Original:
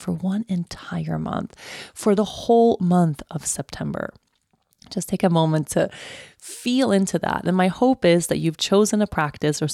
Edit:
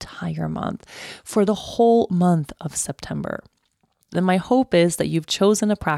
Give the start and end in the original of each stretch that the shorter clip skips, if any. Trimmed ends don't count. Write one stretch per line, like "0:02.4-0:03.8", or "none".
0:04.8-0:07.4